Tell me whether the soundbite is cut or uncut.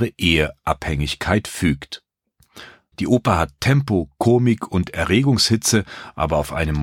cut